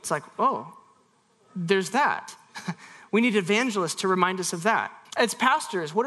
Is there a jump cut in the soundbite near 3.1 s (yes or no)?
no